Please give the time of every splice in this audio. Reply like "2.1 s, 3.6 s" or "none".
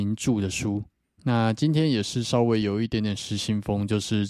1.2 s